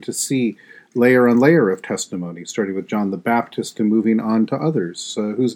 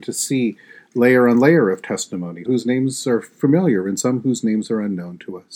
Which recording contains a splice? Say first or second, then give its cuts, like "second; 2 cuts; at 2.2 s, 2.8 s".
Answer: second; 1 cut; at 2.5 s